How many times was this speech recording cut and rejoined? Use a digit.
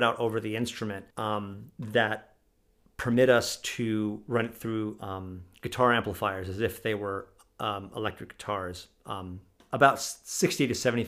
1